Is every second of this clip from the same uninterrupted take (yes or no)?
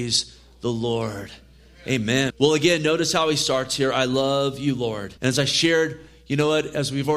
no